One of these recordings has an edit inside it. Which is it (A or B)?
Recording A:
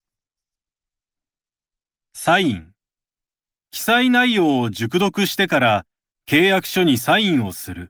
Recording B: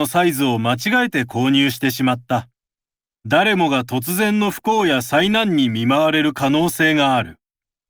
B